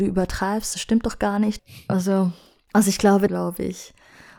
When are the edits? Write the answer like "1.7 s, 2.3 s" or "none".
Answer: 1.6 s, 3.3 s